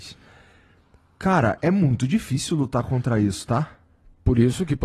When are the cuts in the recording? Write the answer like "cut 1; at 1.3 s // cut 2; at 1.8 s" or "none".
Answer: cut 1; at 1.6 s